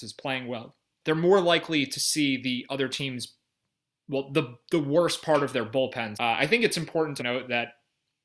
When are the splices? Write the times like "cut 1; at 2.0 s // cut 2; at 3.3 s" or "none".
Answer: cut 1; at 1.0 s // cut 2; at 6.1 s // cut 3; at 7.2 s